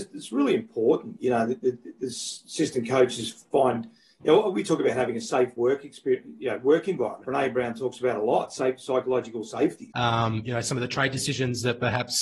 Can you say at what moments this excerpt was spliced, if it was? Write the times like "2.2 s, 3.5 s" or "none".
7.2 s, 9.9 s